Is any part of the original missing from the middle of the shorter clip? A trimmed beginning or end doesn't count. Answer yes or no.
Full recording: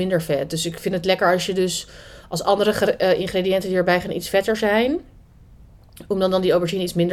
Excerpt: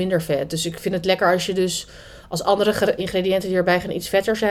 yes